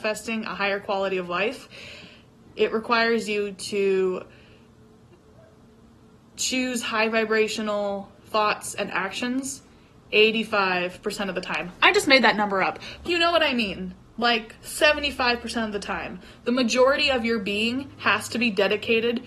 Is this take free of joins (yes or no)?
no